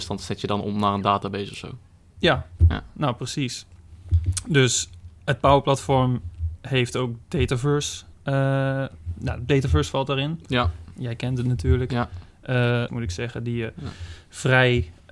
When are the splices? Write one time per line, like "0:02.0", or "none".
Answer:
0:05.2
0:12.9